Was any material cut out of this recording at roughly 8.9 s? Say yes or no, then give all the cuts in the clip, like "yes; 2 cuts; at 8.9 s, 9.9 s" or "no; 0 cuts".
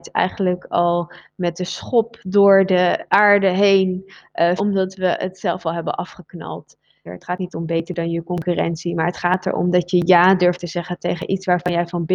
no; 2 cuts; at 4.6 s, 7.1 s